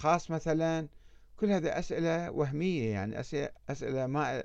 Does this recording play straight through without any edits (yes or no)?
no